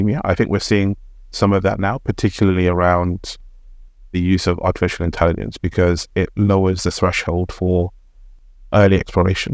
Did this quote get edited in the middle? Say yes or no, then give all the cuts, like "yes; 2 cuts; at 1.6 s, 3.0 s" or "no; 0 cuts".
no; 0 cuts